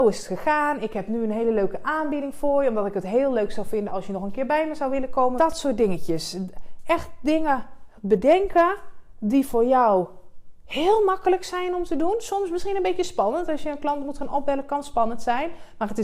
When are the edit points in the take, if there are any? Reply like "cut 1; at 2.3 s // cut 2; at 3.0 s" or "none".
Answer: cut 1; at 5.4 s